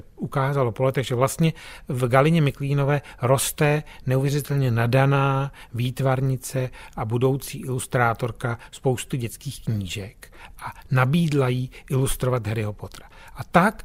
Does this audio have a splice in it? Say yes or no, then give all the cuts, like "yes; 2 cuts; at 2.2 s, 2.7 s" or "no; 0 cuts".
no; 0 cuts